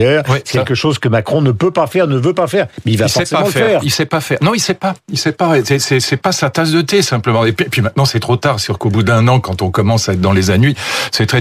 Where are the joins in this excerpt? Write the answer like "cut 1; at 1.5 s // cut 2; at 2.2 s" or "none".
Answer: none

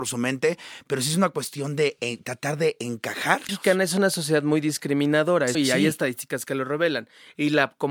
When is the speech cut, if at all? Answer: cut 1; at 3.5 s // cut 2; at 5.5 s

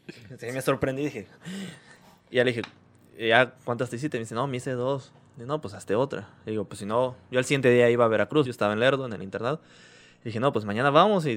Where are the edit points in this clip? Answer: cut 1; at 8.4 s

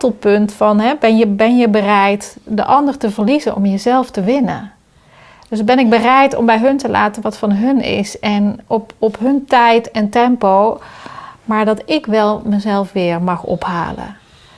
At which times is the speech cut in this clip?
none

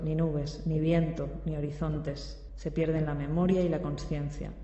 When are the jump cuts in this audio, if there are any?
cut 1; at 2.5 s

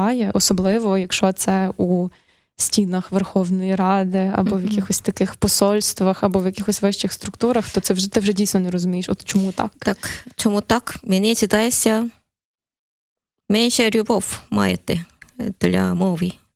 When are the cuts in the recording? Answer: none

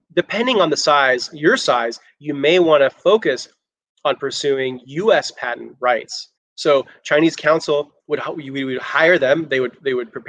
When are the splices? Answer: cut 1; at 6.4 s // cut 2; at 8.0 s

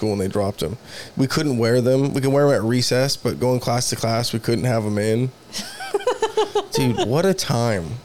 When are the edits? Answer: none

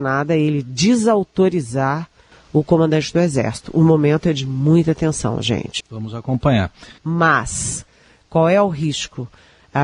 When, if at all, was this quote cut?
cut 1; at 5.8 s // cut 2; at 7.0 s

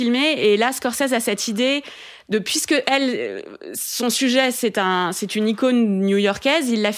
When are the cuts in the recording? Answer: none

